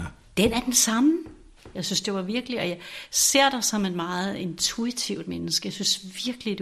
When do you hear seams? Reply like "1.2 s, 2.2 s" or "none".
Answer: 1.7 s